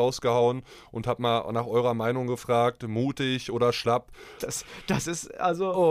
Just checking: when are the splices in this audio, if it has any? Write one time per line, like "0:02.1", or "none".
0:04.4